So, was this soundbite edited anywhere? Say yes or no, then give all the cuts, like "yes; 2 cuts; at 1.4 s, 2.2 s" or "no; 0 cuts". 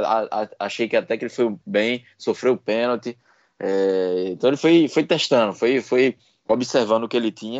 no; 0 cuts